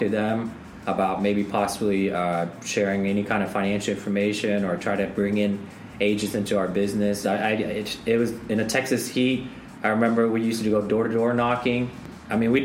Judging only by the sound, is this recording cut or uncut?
cut